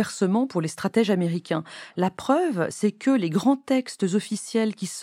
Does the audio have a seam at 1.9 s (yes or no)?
no